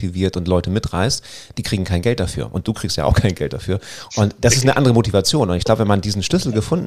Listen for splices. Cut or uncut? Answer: uncut